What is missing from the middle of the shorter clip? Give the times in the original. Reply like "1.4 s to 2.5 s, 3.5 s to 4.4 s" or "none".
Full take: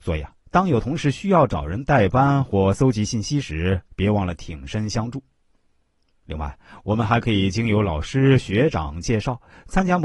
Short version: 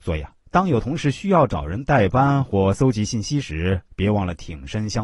none